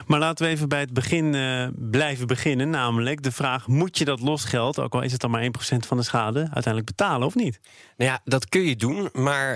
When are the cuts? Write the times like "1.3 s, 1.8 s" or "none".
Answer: none